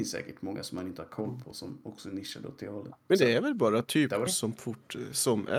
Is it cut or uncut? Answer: cut